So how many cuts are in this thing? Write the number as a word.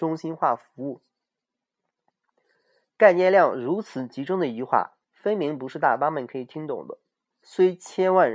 one